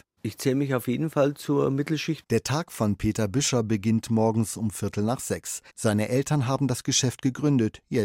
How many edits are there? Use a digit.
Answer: 2